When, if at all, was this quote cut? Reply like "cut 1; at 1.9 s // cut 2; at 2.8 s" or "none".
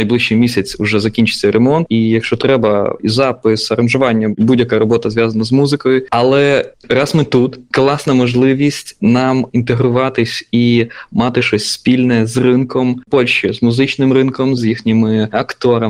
cut 1; at 1.9 s // cut 2; at 6.1 s // cut 3; at 14.6 s